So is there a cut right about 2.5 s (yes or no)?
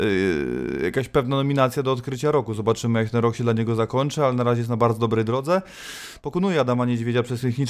no